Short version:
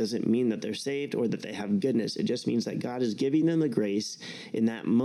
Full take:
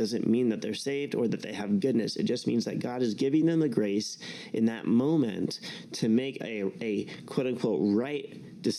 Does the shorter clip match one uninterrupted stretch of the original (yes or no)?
yes